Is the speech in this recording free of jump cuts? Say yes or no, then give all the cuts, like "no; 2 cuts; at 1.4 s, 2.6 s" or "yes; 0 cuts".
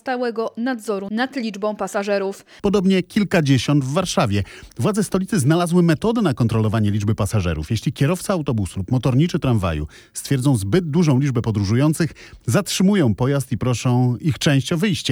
no; 1 cut; at 2.6 s